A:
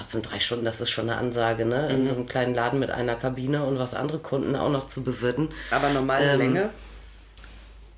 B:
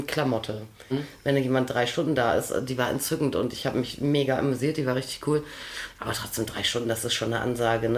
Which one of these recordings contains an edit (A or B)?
B